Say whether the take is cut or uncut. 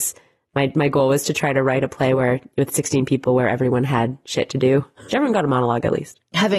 cut